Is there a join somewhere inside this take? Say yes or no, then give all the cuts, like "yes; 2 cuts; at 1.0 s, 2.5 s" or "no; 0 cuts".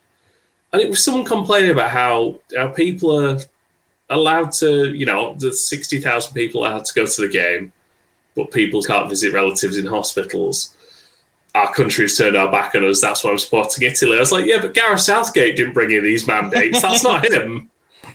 yes; 1 cut; at 8.8 s